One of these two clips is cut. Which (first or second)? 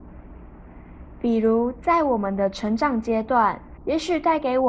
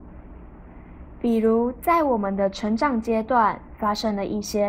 first